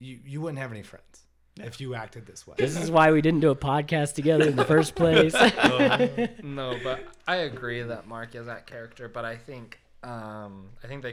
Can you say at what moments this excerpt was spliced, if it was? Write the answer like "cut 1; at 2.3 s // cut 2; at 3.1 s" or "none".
cut 1; at 2.6 s

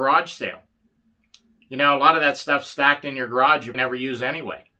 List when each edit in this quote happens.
cut 1; at 3.7 s

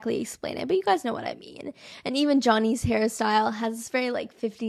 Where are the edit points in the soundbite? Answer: none

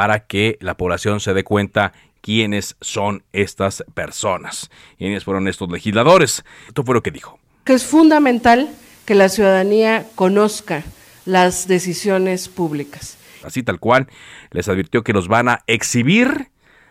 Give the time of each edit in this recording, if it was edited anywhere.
cut 1; at 6.7 s // cut 2; at 13.4 s

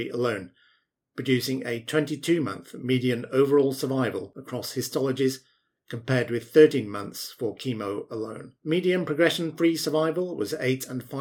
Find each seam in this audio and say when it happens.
cut 1; at 8.6 s

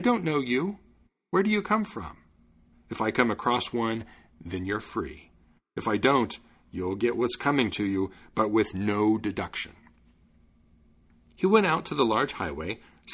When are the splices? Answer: cut 1; at 2.7 s

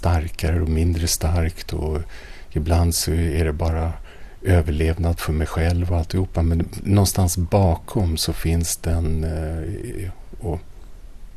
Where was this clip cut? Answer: none

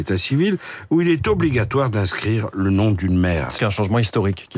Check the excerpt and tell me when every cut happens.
cut 1; at 3.6 s

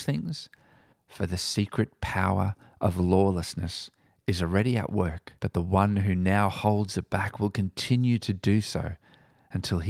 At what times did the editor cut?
cut 1; at 0.9 s // cut 2; at 5.4 s

